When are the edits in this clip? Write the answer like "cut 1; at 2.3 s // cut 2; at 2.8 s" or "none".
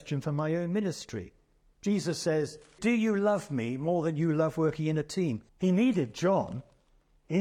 cut 1; at 2.8 s // cut 2; at 5.5 s